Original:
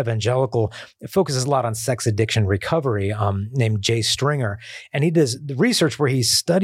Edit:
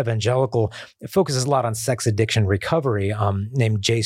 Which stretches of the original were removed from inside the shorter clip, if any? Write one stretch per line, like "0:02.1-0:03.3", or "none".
none